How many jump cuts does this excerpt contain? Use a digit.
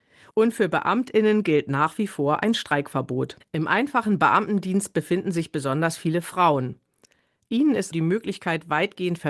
2